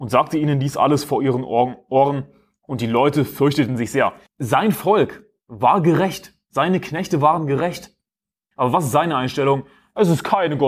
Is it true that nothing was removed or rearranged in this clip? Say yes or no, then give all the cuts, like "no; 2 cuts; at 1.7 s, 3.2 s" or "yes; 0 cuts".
no; 2 cuts; at 4.3 s, 8.5 s